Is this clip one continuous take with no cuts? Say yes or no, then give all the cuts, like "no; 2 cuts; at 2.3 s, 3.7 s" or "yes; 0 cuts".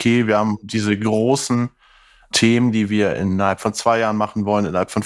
yes; 0 cuts